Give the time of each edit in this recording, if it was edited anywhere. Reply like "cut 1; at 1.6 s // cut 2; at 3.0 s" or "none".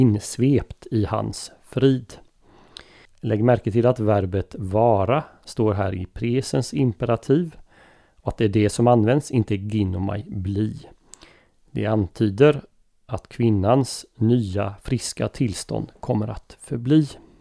cut 1; at 3.1 s